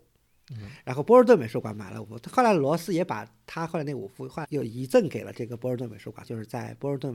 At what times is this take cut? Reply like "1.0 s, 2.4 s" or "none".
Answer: 4.4 s, 6.2 s